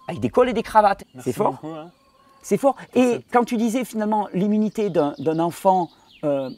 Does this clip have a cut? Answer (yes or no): yes